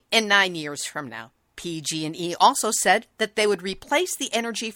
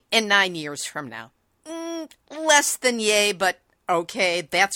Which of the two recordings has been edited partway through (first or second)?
first